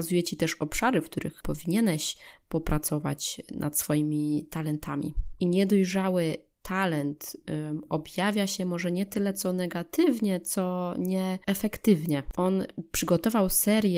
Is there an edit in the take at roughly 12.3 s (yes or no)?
yes